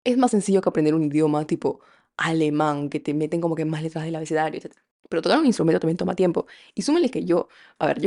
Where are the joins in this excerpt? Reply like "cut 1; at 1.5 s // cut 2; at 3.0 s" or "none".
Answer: none

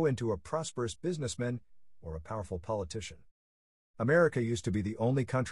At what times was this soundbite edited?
cut 1; at 2.0 s

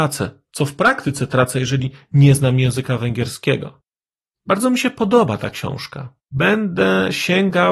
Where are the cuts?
cut 1; at 4.3 s // cut 2; at 6.2 s

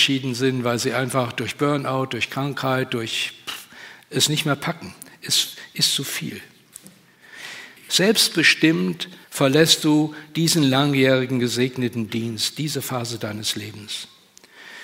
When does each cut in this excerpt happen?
cut 1; at 7.8 s // cut 2; at 9.2 s

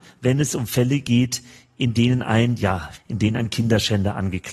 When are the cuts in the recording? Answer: cut 1; at 3.0 s

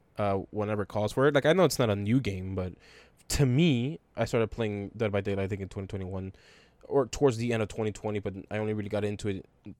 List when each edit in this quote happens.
none

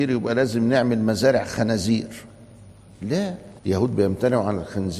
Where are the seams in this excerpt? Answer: cut 1; at 3.6 s

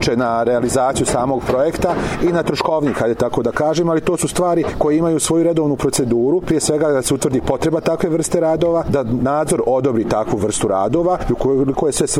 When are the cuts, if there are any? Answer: none

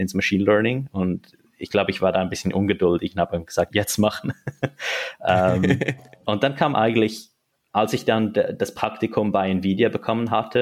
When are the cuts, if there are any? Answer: cut 1; at 3.7 s

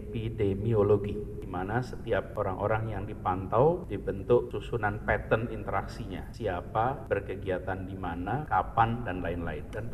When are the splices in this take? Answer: cut 1; at 8.5 s

